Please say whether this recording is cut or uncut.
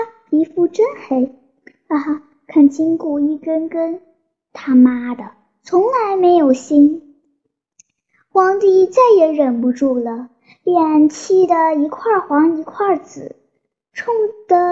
uncut